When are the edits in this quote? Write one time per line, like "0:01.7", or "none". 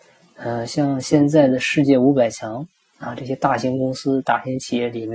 none